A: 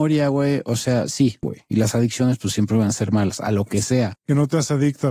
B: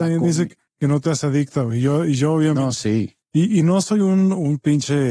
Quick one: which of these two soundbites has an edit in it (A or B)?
A